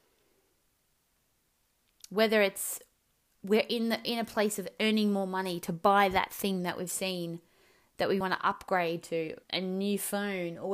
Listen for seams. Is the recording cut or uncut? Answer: cut